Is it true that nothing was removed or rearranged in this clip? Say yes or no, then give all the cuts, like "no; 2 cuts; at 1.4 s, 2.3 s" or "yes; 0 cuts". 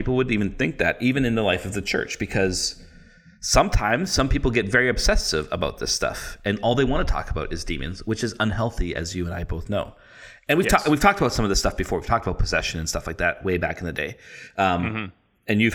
yes; 0 cuts